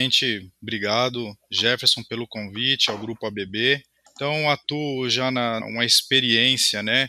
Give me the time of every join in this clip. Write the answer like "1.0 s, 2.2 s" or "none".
4.0 s, 5.6 s